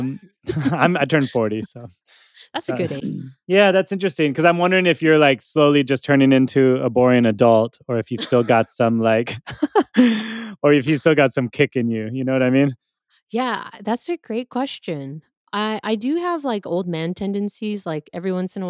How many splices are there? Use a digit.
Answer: 1